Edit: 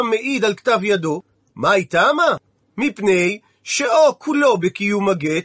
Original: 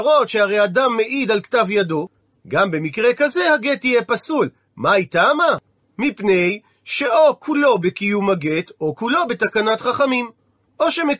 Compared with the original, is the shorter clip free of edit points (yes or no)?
no